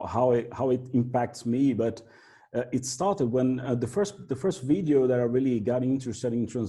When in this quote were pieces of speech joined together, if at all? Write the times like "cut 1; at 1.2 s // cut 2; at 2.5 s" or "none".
none